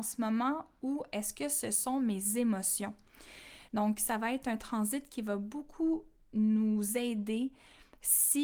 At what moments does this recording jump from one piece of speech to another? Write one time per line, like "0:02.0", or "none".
0:03.7